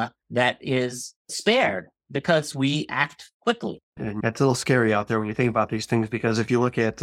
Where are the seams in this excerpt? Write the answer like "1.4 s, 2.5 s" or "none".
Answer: 4.0 s